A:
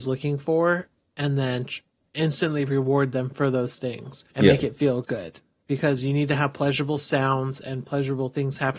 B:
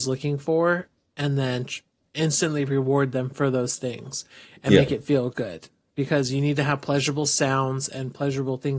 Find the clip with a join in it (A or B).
A